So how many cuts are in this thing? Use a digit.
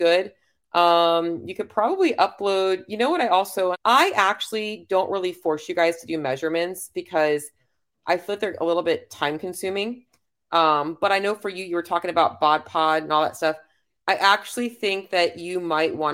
1